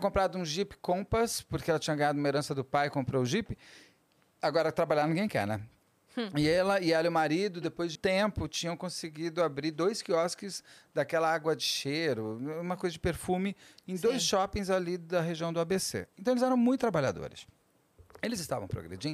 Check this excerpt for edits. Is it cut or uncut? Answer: cut